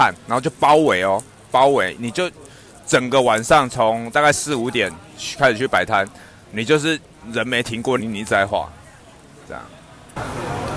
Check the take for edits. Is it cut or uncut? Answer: cut